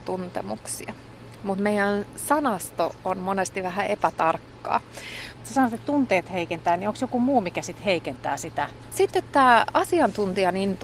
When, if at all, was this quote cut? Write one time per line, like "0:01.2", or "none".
0:05.4
0:08.9